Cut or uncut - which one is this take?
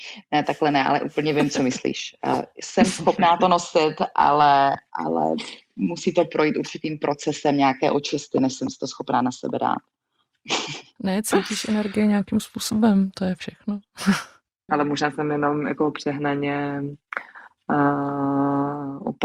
cut